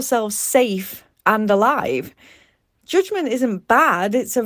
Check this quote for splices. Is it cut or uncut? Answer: uncut